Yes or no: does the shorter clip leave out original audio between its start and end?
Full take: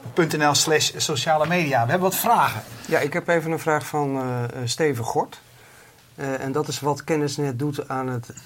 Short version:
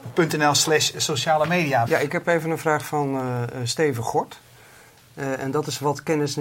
yes